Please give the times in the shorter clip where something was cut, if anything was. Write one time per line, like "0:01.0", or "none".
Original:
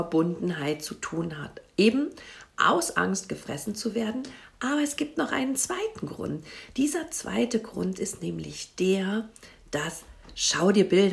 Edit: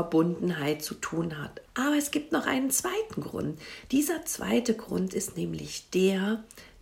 0:01.7